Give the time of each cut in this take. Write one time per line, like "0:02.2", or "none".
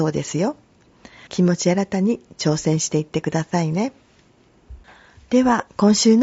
0:01.3

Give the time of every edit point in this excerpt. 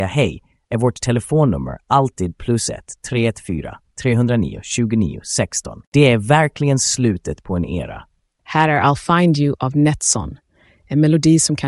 0:05.8
0:08.4

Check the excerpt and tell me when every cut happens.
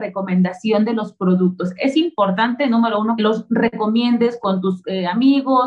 0:03.2

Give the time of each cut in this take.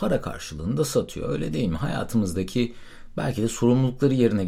none

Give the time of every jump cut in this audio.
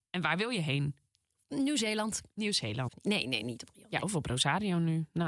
0:02.9

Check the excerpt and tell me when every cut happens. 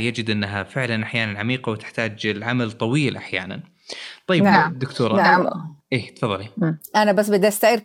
none

